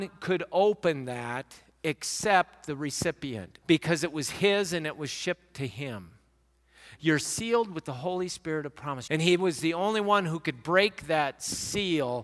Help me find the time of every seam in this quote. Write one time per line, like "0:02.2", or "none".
0:03.6
0:07.0
0:09.1